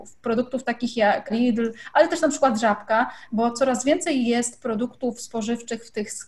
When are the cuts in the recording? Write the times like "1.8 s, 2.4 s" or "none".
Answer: 1.3 s